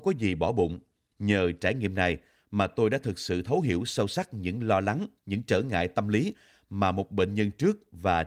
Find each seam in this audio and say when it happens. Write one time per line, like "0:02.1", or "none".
0:01.1
0:05.2